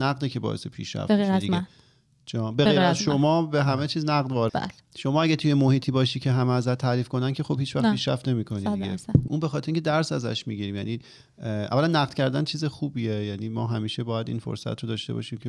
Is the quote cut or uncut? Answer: cut